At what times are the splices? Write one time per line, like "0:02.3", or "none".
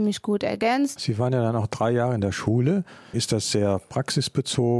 0:01.0
0:03.1